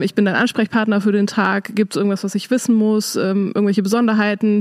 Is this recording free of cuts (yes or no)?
yes